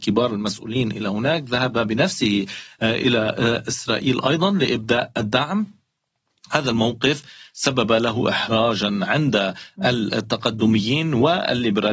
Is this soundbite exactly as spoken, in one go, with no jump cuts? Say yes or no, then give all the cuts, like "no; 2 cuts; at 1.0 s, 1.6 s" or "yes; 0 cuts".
yes; 0 cuts